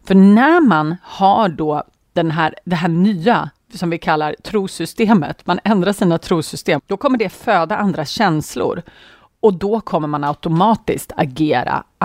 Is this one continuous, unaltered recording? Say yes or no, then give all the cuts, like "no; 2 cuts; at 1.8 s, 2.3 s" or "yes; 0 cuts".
no; 1 cut; at 6.8 s